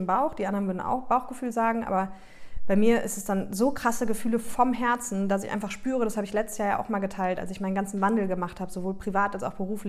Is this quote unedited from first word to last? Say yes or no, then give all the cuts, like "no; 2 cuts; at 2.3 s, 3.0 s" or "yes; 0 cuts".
yes; 0 cuts